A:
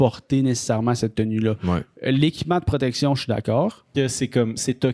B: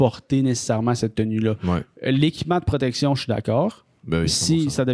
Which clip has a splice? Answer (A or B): A